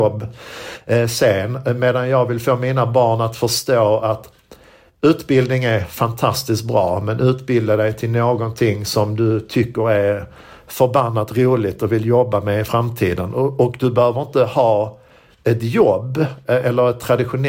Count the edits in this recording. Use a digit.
0